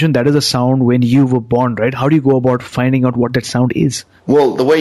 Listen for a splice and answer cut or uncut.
uncut